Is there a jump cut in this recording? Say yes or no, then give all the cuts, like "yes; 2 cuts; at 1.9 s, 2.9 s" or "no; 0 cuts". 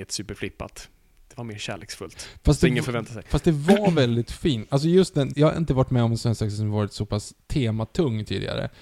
yes; 1 cut; at 5.3 s